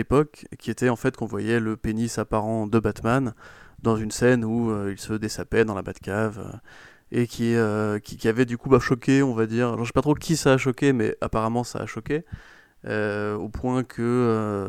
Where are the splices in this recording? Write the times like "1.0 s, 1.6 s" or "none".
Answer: none

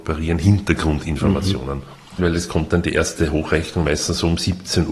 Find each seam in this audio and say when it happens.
2.2 s

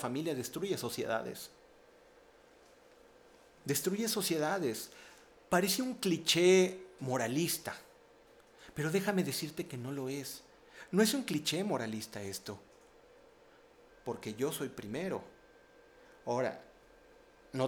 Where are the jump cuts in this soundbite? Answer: 13.9 s

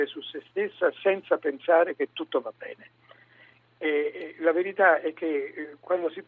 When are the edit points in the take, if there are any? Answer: none

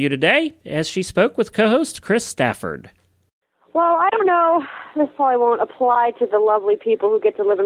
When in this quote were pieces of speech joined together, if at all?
none

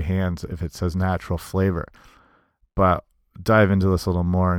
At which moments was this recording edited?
none

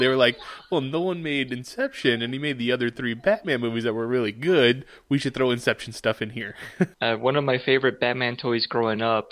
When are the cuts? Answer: 6.9 s

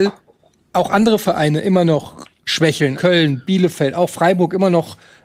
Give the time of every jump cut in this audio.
2.9 s

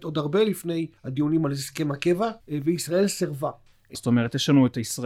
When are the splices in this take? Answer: 1.0 s, 2.4 s, 3.9 s

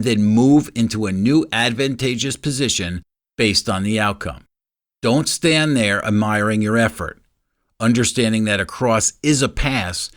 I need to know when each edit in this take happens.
none

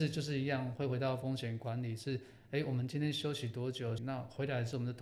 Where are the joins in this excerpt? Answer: 4.0 s

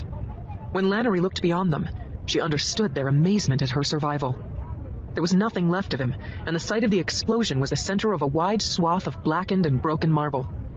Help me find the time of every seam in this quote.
5.1 s

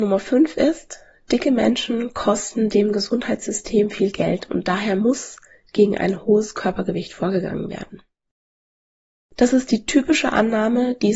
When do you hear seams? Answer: none

